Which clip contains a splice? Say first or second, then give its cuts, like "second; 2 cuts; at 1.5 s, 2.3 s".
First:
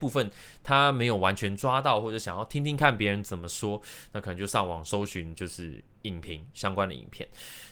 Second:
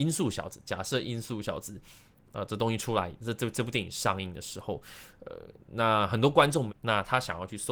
second; 1 cut; at 6.7 s